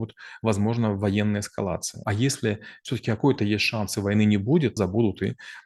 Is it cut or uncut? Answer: cut